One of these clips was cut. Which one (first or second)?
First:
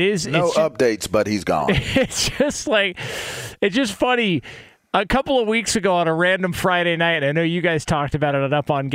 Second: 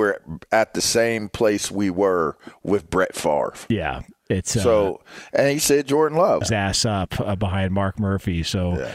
second